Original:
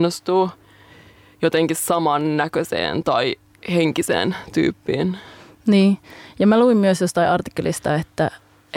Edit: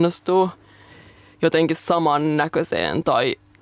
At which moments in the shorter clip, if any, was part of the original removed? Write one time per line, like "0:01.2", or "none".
none